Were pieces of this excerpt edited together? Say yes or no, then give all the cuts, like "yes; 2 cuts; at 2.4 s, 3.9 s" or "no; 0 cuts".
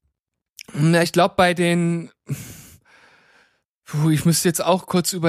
no; 0 cuts